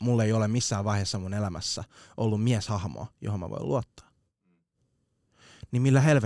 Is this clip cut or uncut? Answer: uncut